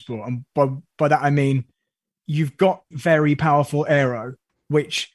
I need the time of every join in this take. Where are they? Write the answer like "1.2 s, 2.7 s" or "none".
2.9 s